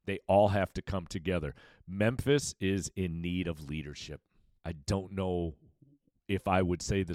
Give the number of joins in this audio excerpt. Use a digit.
1